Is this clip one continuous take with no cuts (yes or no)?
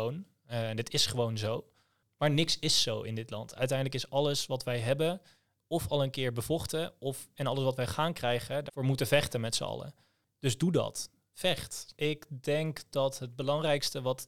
no